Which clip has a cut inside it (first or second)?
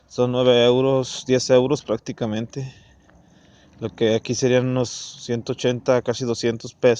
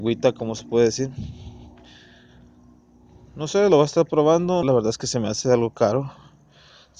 second